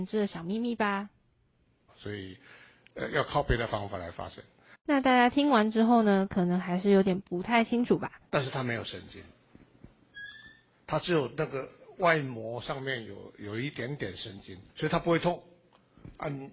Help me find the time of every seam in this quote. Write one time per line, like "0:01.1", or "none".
0:01.9
0:08.2
0:14.7